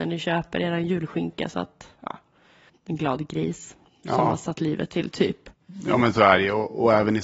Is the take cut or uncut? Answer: cut